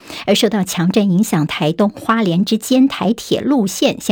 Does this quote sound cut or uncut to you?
cut